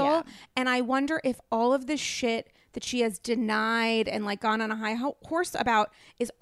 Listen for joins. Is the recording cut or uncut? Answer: uncut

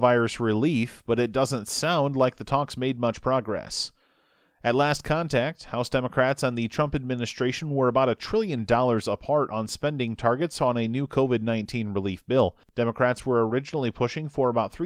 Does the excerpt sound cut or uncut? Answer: uncut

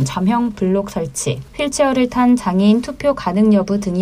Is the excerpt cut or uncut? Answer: cut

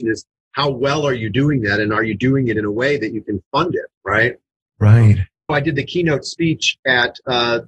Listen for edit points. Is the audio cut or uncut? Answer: cut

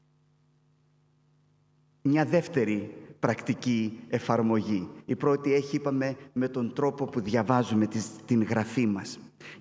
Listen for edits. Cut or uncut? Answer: uncut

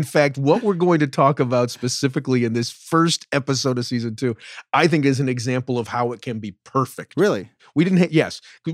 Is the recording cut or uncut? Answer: uncut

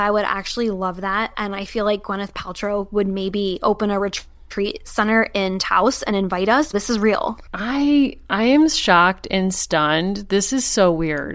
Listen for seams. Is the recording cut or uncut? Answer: cut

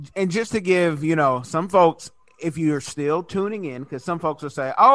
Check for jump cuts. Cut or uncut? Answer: uncut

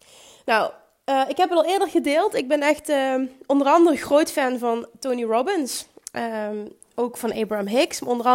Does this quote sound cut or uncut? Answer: uncut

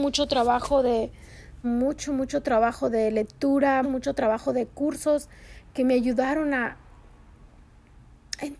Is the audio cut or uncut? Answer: cut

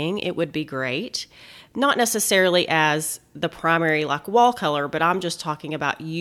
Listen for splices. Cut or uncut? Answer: uncut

